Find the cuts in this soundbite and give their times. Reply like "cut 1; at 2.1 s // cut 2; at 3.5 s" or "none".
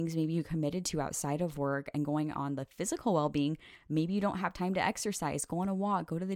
none